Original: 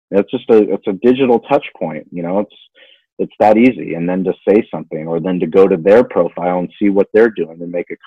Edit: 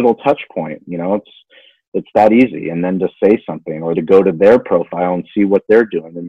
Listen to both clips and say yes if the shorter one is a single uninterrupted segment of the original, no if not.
no